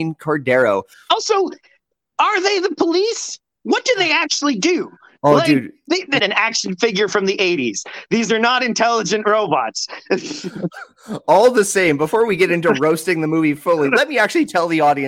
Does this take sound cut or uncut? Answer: cut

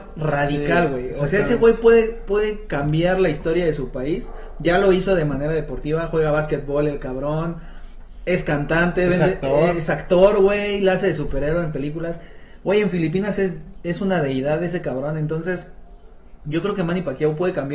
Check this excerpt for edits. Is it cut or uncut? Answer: uncut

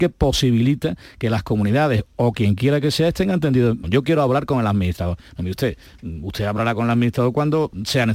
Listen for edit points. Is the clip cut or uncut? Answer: cut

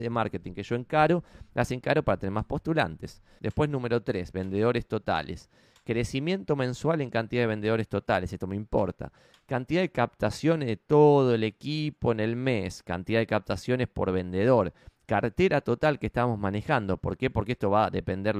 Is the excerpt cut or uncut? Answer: cut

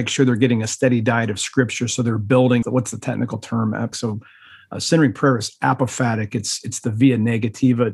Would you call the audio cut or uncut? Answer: cut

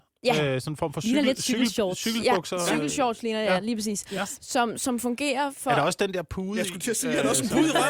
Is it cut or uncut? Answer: uncut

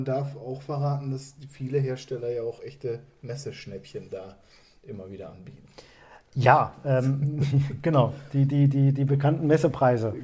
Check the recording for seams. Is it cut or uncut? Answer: uncut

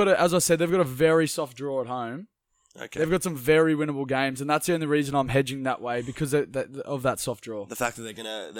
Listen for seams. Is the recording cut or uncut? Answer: uncut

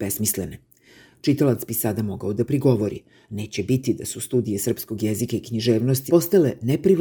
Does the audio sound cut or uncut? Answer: cut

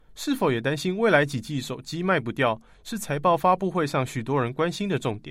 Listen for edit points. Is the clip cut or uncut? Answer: uncut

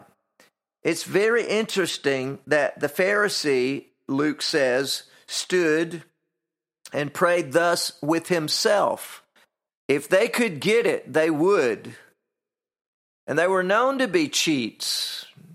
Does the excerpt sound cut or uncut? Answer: cut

